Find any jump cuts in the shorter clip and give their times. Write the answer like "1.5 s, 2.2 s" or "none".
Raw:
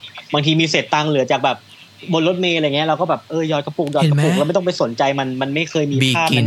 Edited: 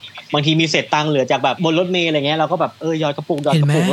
1.6 s